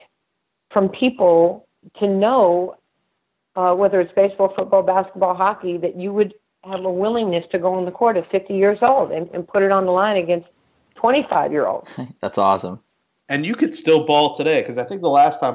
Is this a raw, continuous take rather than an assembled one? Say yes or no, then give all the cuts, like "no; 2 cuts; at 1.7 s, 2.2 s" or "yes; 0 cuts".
yes; 0 cuts